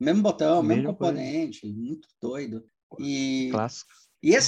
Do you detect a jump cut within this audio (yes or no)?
no